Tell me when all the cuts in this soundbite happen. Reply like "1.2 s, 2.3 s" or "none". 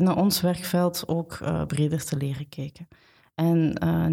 none